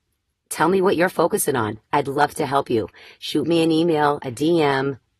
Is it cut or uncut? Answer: uncut